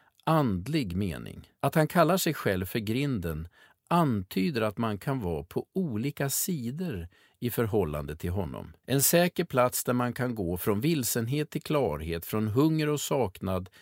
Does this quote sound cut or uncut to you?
cut